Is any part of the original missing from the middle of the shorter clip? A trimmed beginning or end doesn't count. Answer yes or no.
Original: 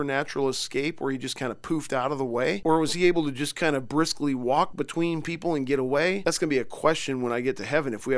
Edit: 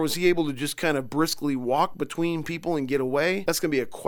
no